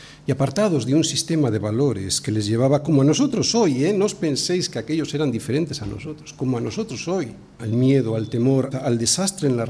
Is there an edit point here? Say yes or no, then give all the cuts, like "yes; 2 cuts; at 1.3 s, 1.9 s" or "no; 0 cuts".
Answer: yes; 2 cuts; at 7.6 s, 8.7 s